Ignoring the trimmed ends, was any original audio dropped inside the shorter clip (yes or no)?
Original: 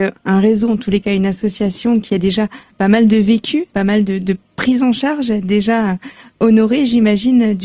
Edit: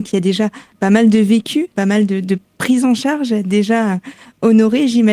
no